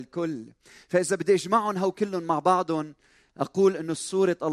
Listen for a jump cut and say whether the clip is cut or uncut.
uncut